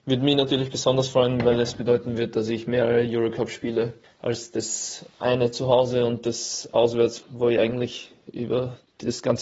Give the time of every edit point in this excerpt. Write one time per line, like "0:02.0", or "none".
0:07.2